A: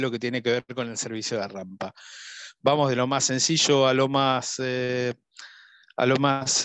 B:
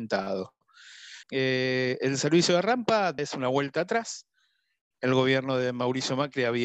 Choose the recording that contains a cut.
B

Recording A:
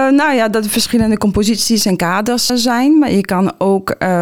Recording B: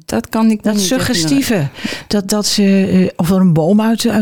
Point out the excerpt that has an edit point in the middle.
A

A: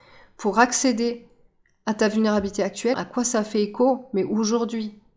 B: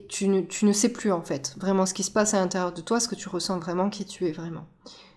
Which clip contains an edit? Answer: A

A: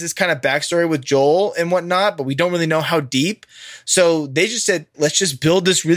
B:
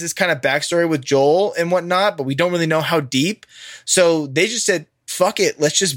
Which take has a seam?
A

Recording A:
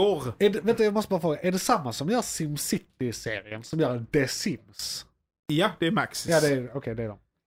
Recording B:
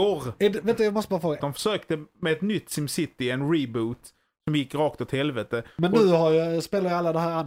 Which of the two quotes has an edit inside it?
B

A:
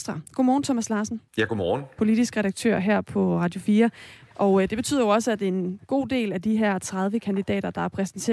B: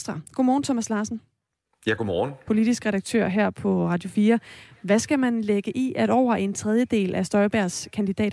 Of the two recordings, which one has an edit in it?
A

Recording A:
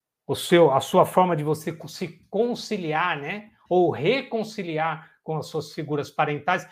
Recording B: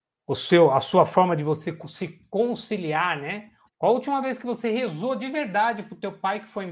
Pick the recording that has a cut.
B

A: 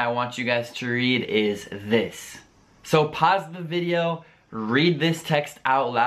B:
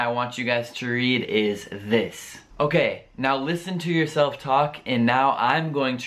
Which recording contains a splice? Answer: B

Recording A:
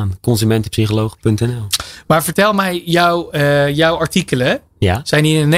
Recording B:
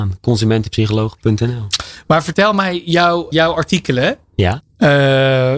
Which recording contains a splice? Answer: B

